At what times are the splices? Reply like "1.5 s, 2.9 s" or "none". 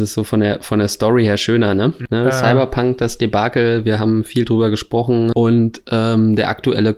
2.1 s, 5.3 s

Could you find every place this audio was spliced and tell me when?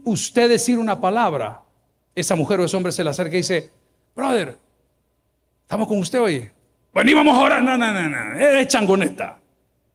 none

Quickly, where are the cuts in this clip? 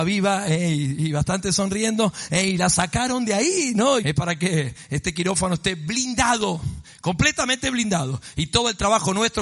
4.0 s

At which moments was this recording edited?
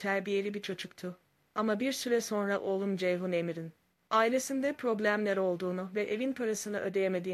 none

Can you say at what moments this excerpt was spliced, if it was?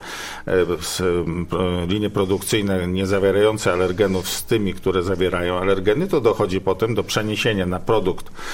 none

